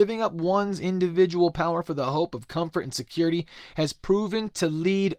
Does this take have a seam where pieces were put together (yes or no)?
no